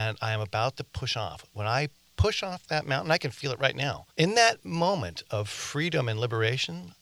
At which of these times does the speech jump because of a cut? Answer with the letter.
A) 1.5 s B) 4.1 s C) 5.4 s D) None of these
B